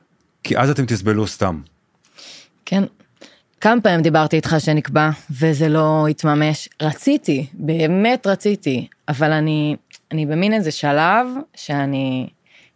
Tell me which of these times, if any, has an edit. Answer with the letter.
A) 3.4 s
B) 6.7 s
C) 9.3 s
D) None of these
A